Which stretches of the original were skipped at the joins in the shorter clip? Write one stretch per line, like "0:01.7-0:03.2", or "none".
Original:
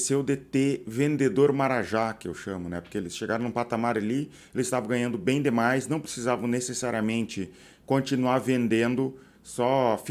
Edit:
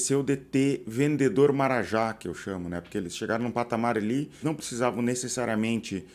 0:04.4-0:05.9